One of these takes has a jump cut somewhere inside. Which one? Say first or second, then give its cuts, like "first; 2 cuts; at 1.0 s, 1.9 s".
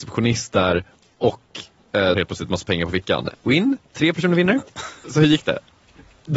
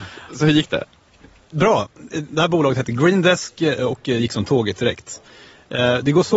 first; 3 cuts; at 2.1 s, 3.3 s, 5.0 s